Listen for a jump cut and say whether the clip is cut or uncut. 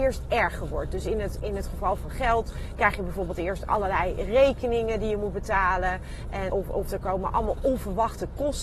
cut